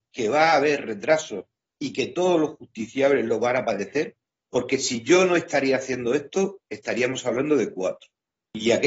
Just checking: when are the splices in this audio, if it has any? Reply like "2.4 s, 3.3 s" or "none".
6.7 s